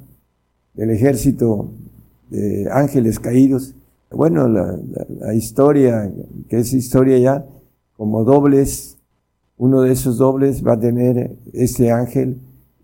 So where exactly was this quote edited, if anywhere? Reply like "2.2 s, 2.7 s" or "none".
4.1 s, 11.5 s